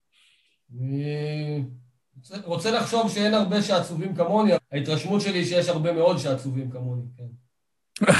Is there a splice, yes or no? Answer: yes